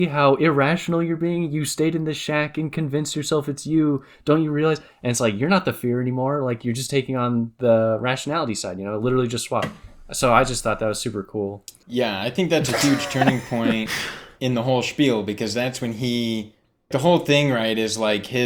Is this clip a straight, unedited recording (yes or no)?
no